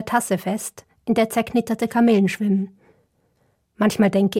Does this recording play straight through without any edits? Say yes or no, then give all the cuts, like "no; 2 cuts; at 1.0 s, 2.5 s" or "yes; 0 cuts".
yes; 0 cuts